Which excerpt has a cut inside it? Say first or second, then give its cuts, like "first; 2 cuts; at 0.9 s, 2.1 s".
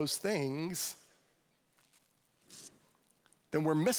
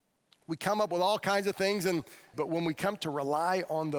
second; 1 cut; at 2.3 s